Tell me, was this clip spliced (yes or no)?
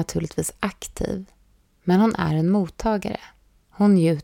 no